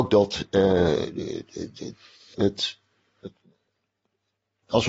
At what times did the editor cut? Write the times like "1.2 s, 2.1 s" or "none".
2.3 s